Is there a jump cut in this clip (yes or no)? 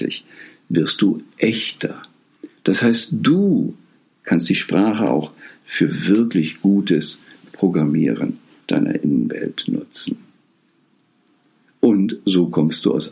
no